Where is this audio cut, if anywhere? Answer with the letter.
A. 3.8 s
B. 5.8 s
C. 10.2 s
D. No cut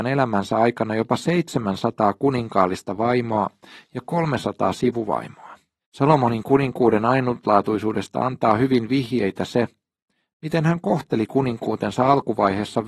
B